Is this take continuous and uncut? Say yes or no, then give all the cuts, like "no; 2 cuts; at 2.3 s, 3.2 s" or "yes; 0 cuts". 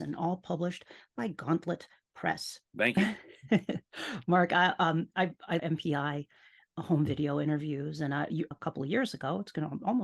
no; 3 cuts; at 2.7 s, 5.6 s, 8.5 s